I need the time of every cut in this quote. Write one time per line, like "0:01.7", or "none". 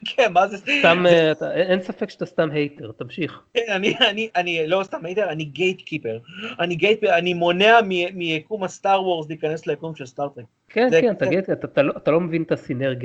none